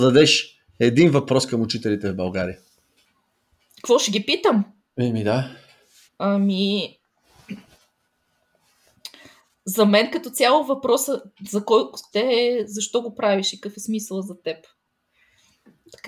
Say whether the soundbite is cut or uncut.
cut